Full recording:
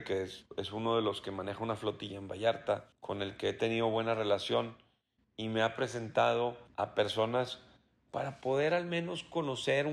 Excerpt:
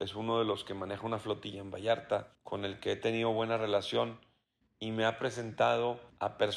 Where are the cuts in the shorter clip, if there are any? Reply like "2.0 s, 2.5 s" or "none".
none